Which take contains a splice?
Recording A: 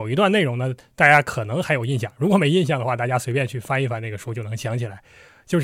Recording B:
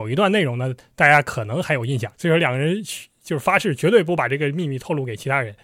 B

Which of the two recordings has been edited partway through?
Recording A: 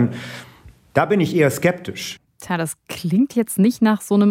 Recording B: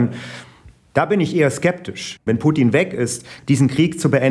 B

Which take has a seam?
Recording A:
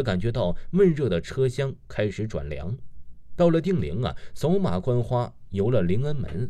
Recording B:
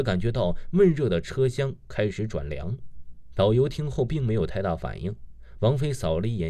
B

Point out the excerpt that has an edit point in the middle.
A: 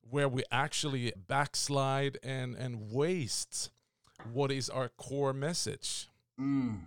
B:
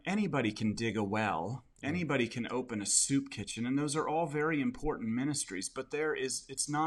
A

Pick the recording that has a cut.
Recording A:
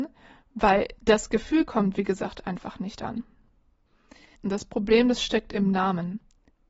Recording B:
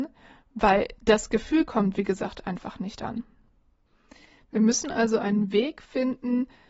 A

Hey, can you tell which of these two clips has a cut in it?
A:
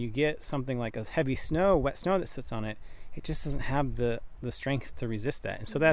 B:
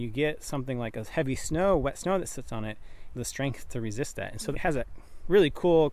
B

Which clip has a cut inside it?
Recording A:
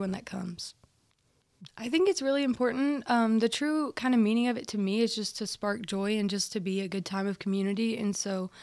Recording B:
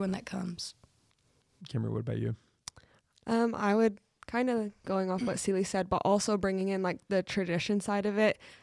A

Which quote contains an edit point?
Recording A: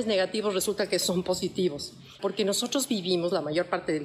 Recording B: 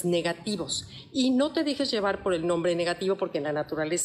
A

